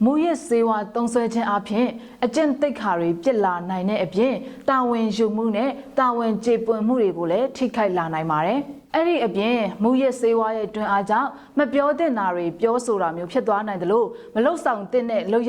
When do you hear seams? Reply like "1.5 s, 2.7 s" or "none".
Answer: 8.9 s

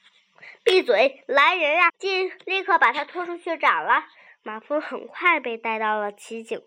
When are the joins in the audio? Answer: 1.9 s, 4.3 s

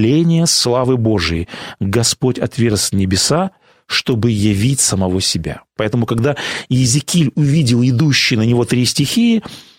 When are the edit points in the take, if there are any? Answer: 5.8 s

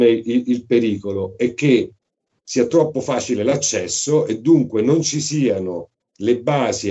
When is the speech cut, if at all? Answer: none

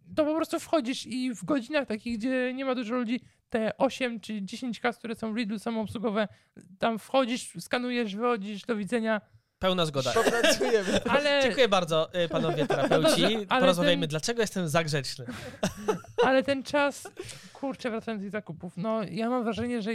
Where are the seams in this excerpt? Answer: 10.1 s

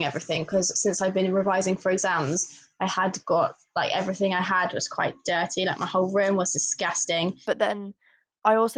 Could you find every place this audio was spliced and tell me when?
7.4 s

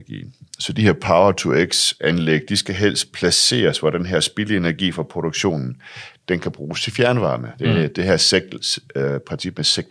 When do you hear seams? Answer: none

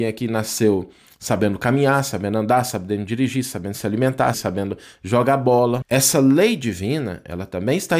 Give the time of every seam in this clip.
4.3 s, 5.8 s

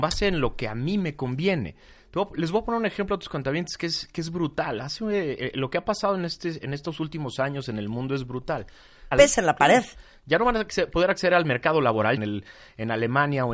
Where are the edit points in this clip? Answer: 9.1 s, 12.2 s

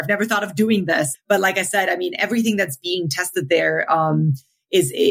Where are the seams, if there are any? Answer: 1.1 s

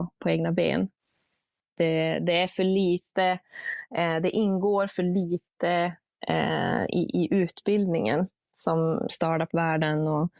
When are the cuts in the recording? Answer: 9.1 s

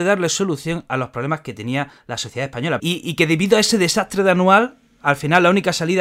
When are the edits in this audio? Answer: 2.8 s

